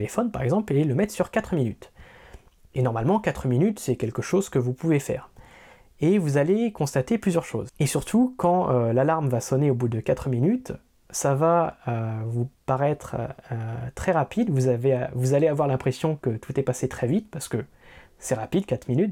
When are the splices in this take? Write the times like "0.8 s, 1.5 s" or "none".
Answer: 7.7 s